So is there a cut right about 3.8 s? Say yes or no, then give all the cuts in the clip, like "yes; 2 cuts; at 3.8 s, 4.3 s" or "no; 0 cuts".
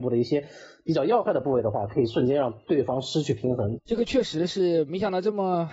yes; 1 cut; at 3.8 s